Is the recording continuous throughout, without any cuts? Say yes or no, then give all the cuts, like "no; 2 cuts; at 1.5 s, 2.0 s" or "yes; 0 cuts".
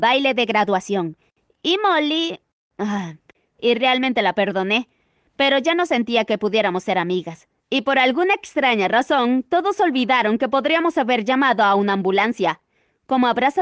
no; 2 cuts; at 3.5 s, 7.6 s